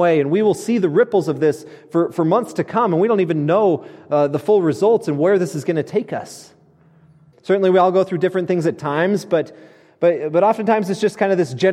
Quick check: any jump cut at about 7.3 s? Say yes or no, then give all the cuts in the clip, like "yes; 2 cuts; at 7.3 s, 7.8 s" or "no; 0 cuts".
yes; 1 cut; at 7.3 s